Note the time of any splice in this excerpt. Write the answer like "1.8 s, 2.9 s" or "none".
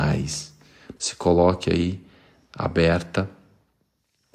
1.0 s